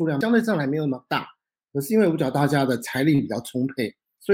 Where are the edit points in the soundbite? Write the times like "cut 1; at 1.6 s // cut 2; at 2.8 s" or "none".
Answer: none